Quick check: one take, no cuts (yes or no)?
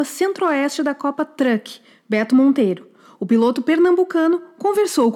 yes